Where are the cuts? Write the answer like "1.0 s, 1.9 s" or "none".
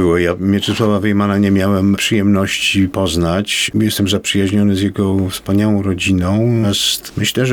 6.6 s